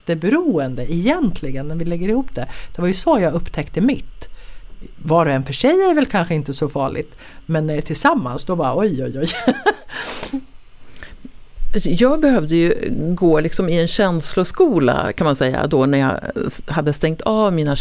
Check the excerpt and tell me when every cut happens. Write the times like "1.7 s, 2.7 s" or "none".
none